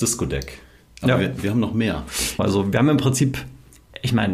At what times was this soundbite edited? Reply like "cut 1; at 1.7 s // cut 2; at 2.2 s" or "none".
cut 1; at 2.4 s